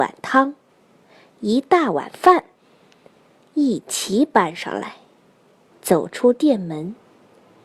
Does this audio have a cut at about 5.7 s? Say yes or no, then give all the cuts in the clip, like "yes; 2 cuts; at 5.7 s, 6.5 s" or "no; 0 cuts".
yes; 1 cut; at 5.7 s